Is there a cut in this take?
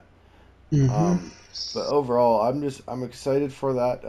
no; 0 cuts

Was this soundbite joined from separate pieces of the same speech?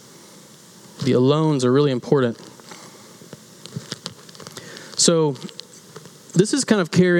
no; 0 cuts

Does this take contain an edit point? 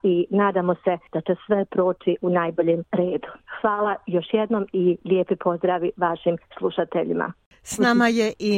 no; 0 cuts

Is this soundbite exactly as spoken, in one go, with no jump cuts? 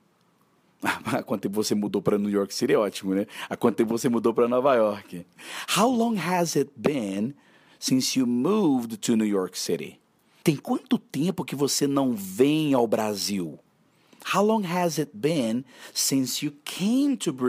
no; 1 cut; at 10.4 s

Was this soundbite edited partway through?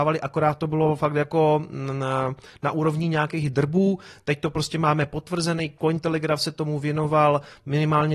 no; 0 cuts

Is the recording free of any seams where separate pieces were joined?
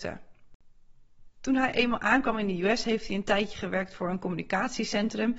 yes; 0 cuts

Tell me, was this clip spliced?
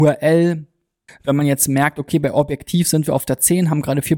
yes; 1 cut; at 1.1 s

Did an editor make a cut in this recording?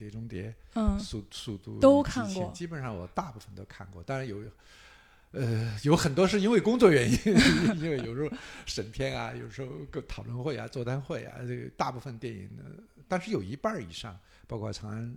no; 0 cuts

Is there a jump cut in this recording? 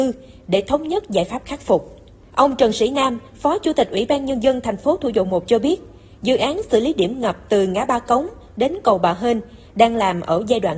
no; 0 cuts

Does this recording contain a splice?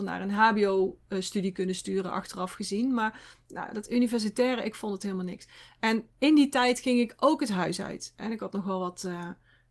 no; 0 cuts

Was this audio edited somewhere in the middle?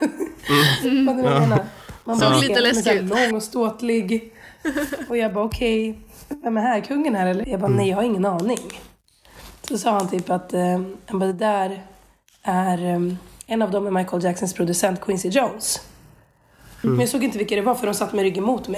yes; 2 cuts; at 7.4 s, 16.8 s

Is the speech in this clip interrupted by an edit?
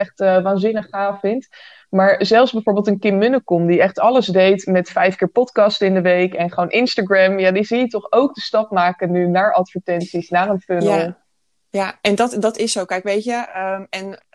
no; 0 cuts

